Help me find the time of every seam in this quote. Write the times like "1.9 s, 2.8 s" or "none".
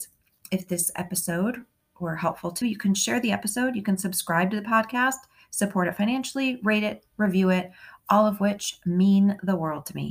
2.6 s